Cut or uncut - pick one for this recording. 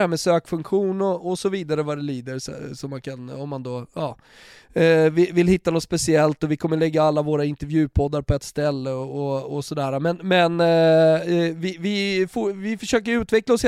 uncut